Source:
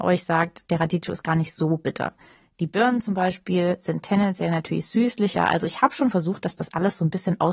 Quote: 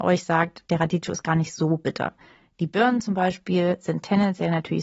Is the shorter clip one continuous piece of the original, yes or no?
yes